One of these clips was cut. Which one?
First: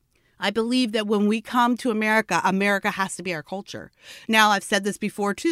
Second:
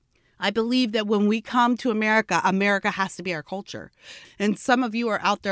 second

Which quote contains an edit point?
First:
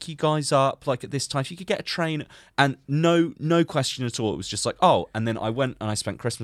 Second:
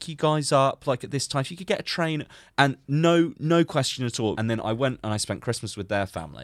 second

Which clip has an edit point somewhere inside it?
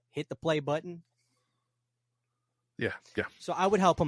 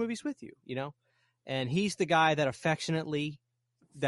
first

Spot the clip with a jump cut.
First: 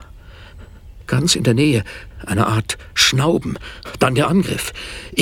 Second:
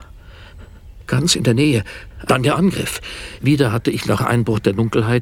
second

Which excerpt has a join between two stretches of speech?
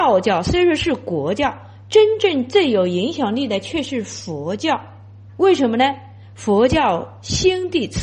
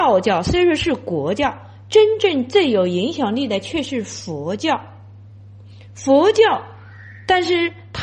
first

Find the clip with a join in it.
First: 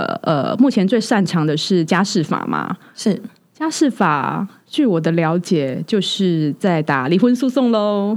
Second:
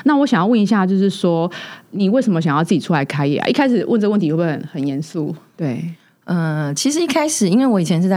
second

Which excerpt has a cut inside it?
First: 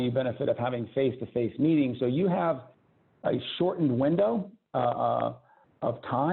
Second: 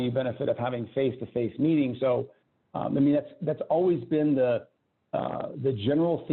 second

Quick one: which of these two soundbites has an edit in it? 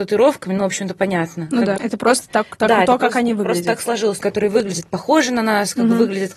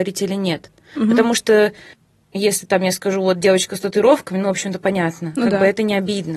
first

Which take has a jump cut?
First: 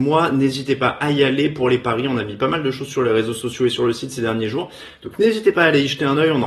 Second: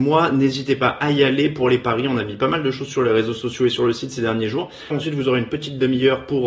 second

